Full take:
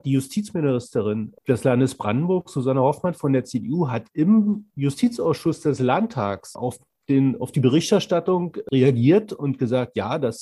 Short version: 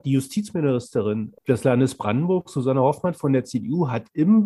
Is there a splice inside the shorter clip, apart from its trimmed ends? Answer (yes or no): no